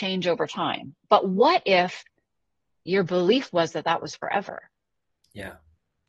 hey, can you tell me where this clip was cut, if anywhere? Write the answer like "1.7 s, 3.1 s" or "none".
none

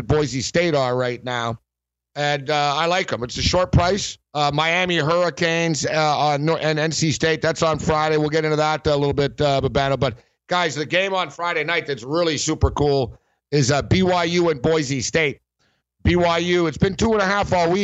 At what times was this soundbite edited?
4.2 s

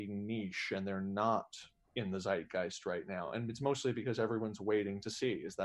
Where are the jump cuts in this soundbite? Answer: none

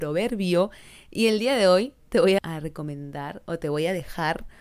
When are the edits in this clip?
2.4 s

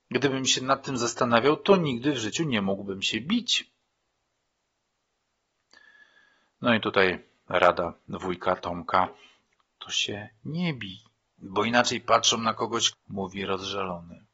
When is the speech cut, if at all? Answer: 11.4 s, 12.9 s

